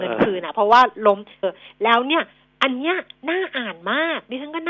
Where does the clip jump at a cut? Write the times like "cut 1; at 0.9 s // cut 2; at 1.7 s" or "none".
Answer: cut 1; at 1.4 s